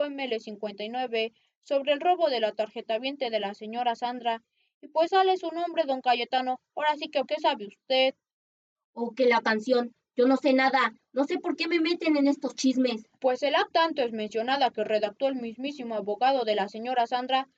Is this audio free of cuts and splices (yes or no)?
no